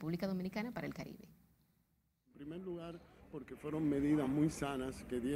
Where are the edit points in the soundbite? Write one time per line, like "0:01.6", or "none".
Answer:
none